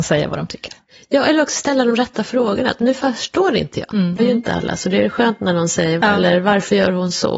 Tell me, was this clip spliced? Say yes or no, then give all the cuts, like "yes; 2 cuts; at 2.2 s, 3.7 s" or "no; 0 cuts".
yes; 2 cuts; at 4.2 s, 6.0 s